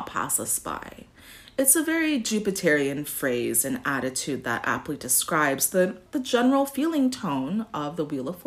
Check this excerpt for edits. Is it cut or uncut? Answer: cut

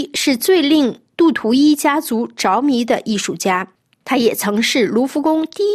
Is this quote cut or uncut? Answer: cut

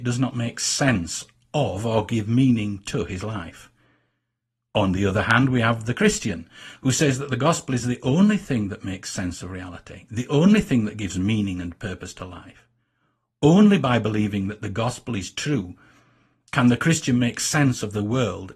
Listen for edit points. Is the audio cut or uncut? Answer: uncut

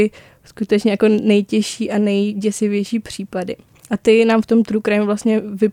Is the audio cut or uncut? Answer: uncut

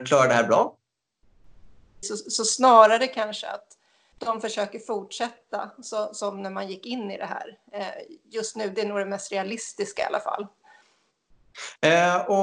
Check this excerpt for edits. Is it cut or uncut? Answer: cut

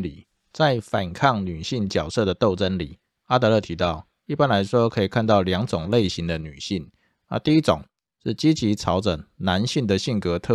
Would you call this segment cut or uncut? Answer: uncut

